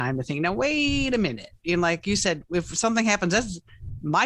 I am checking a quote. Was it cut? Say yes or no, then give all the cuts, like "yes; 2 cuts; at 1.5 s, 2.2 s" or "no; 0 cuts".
no; 0 cuts